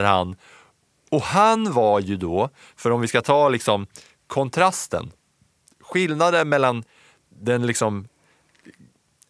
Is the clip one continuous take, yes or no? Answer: yes